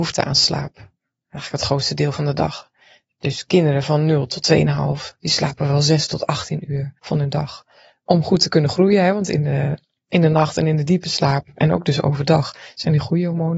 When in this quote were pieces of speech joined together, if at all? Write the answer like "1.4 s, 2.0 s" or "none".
7.0 s